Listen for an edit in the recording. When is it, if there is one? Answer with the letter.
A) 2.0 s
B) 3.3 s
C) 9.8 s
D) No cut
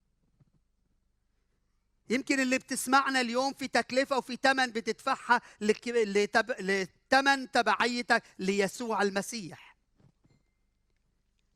D